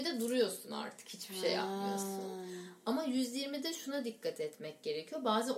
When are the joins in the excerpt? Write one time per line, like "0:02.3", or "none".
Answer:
none

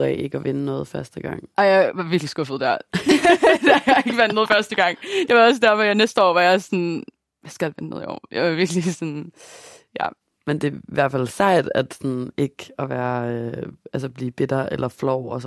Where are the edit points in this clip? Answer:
none

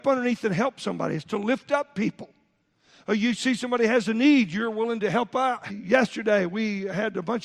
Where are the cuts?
0:05.7

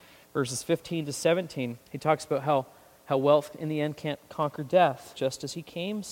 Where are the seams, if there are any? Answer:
0:01.8
0:05.1

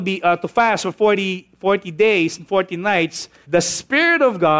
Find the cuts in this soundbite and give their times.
0:03.4

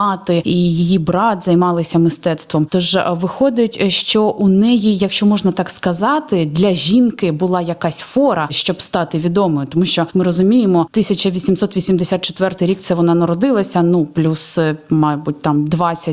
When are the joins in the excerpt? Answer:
none

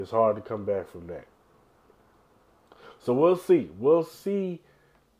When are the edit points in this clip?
none

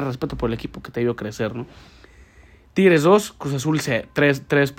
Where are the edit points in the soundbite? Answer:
none

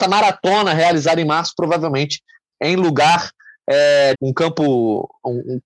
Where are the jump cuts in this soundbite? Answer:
0:04.1

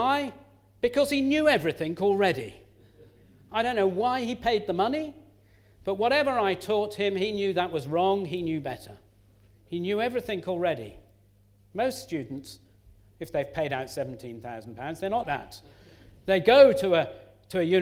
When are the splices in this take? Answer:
0:15.2

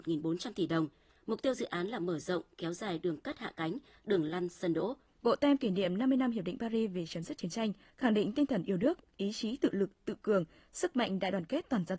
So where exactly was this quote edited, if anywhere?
0:05.1
0:07.9

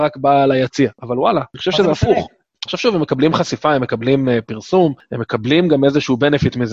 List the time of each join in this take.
0:02.6

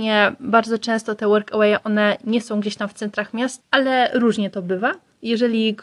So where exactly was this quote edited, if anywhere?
0:03.6

